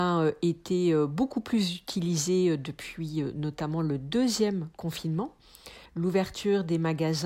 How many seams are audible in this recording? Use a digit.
1